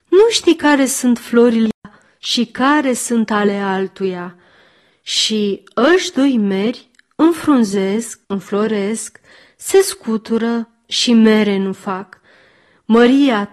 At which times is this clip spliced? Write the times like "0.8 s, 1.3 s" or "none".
8.2 s

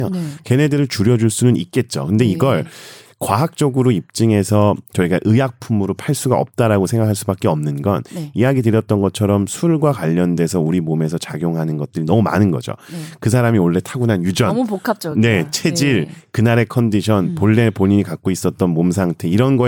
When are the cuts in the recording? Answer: none

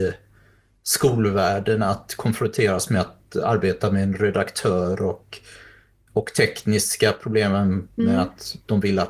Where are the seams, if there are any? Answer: none

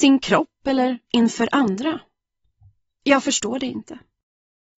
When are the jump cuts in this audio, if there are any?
none

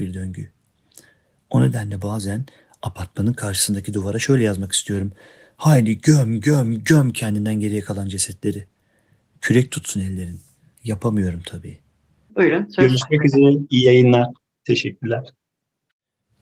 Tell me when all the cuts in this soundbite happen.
10.8 s, 12.3 s

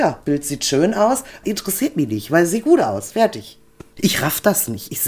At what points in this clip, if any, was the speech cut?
1.4 s, 4.0 s

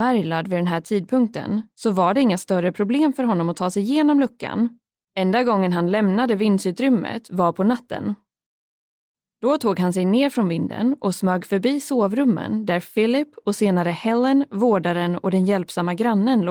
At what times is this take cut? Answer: 5.1 s

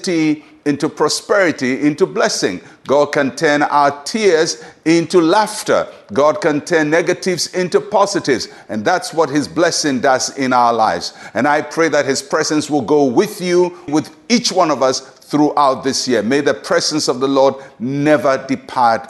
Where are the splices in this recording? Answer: 13.9 s

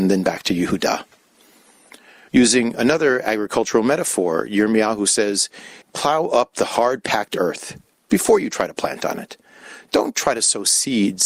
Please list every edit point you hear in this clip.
2.3 s, 5.8 s

